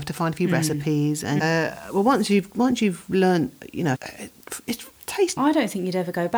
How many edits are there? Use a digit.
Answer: 3